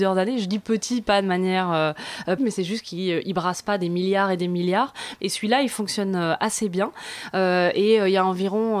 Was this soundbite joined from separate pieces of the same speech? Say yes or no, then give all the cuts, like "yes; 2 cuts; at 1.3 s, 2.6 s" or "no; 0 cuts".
yes; 2 cuts; at 2.4 s, 5.2 s